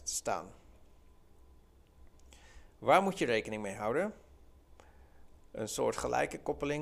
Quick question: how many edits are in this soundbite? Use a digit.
1